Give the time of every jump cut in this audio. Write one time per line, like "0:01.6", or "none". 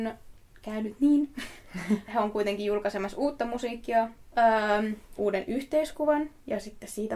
0:05.2